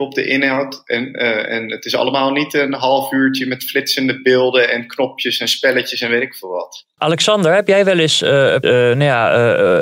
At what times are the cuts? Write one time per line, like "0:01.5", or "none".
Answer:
0:07.0
0:08.6